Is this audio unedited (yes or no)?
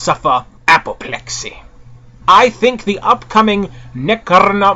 no